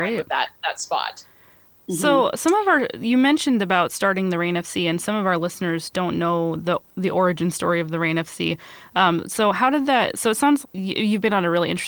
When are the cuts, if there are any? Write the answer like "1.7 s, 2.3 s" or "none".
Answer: 10.6 s